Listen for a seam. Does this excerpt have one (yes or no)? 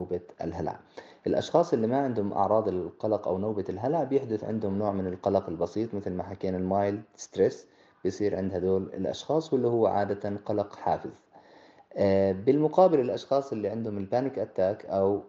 no